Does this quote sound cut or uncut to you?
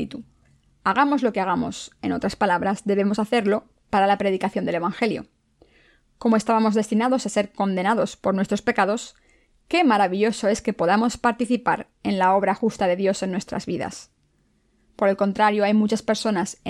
uncut